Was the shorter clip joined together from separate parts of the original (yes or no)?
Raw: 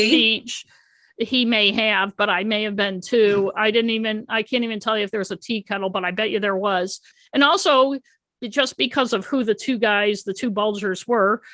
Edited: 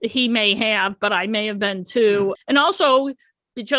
yes